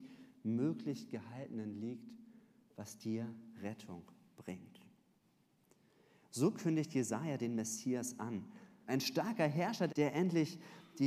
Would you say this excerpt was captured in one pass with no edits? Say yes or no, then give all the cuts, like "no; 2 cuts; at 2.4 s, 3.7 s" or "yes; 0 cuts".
no; 2 cuts; at 8.9 s, 9.9 s